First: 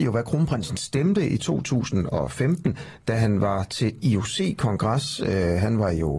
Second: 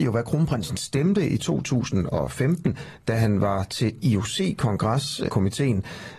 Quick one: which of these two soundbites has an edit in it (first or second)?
second